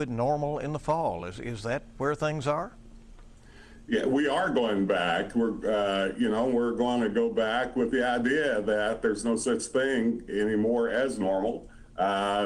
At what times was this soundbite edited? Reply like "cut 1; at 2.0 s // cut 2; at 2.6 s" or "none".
none